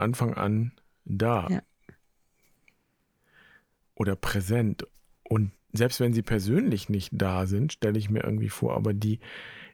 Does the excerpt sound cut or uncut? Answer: uncut